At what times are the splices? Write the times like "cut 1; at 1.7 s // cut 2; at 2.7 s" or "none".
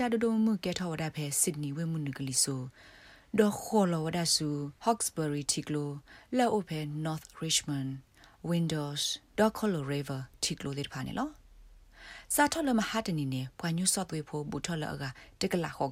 cut 1; at 4.8 s